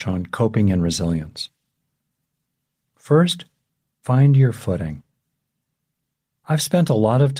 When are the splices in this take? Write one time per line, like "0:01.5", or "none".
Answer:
none